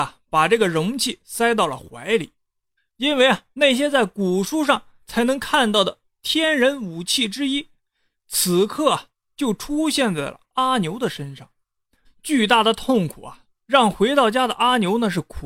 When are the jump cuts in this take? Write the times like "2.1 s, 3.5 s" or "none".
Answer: 2.8 s, 12.0 s